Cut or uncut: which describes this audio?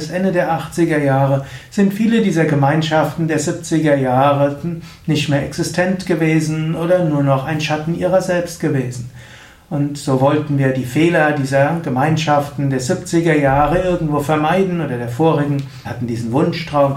cut